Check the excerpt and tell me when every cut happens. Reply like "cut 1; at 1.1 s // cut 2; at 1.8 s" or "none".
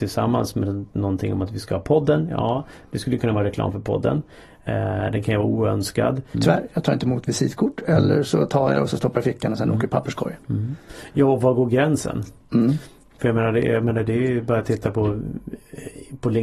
cut 1; at 6.3 s